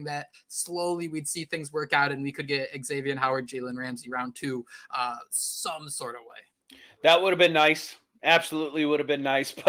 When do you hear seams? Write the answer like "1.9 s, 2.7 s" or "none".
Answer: none